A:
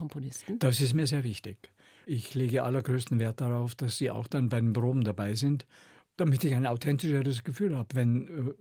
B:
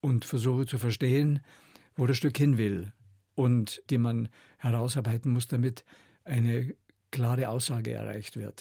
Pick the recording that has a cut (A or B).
B